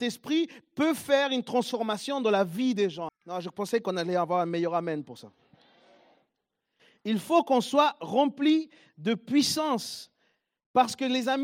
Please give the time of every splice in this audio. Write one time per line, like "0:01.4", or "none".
0:03.1

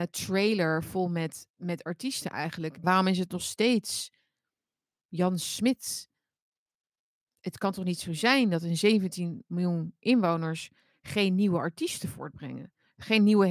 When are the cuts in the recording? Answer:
0:02.8

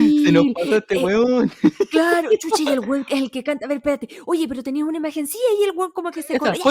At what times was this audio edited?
none

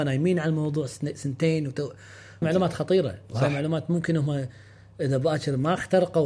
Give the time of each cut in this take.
0:02.4

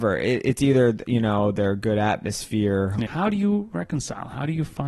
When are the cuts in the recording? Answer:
0:03.1

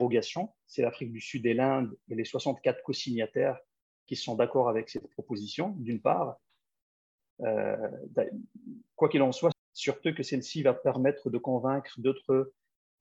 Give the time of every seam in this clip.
0:07.3
0:09.5

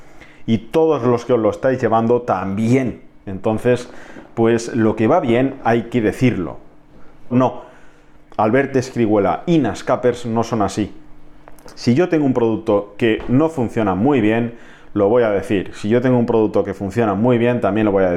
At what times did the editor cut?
0:07.3

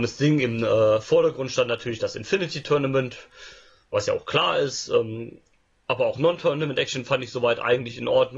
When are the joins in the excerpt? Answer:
none

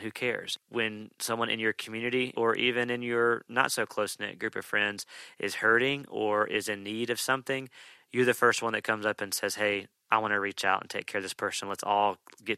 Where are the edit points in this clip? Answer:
0:02.3

